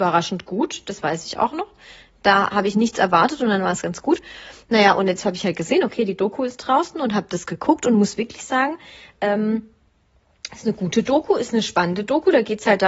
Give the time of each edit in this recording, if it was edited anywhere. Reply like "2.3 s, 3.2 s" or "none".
none